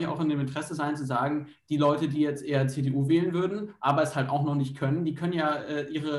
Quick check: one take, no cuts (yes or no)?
yes